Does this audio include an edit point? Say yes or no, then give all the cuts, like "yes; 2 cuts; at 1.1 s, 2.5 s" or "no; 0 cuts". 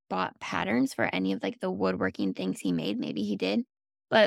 no; 0 cuts